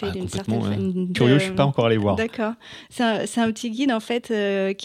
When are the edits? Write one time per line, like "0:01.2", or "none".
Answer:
0:01.1